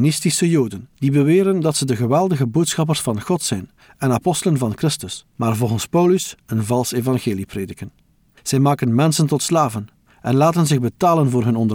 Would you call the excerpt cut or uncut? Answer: uncut